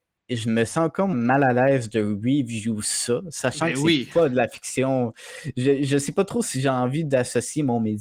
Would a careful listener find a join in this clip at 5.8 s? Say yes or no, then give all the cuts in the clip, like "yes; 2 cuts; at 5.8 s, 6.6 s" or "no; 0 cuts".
no; 1 cut; at 1.1 s